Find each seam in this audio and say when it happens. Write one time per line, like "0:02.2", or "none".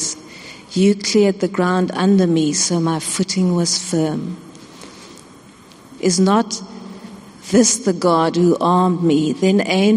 0:06.0